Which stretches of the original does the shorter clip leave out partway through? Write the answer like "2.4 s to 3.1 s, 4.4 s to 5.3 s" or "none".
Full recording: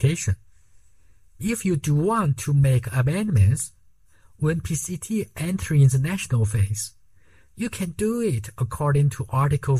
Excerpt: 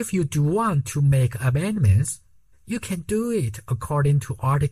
4.0 s to 7.4 s